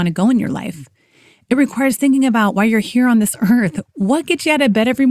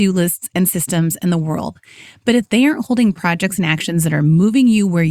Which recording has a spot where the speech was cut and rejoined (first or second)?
first